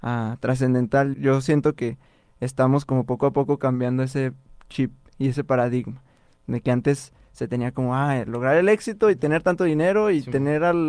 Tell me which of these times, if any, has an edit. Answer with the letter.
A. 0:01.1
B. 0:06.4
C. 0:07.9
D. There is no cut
A